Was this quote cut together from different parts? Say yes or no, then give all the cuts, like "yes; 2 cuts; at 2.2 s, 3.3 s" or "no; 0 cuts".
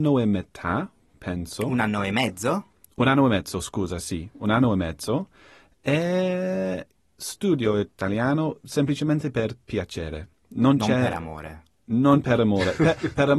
no; 0 cuts